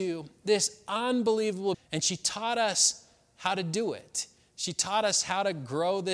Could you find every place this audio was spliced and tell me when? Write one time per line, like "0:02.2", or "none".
0:01.7